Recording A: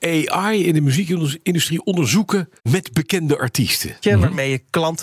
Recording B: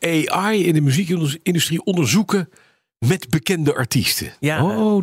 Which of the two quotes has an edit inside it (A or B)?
A